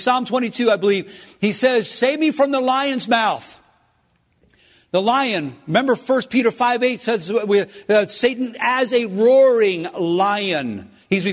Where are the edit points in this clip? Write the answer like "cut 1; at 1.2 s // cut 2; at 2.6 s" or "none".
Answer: none